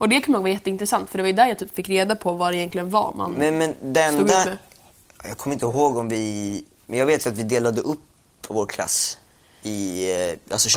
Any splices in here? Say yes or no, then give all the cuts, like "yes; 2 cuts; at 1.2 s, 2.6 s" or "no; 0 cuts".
no; 0 cuts